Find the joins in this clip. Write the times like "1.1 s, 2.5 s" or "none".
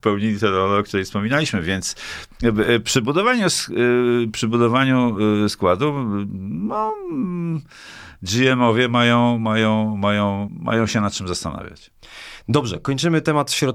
10.5 s